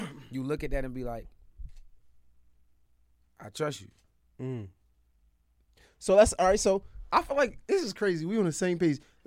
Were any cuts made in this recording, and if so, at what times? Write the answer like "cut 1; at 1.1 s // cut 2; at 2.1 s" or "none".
none